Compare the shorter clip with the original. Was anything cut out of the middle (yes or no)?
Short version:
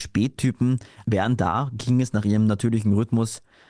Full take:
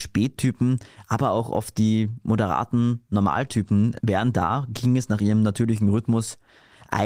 yes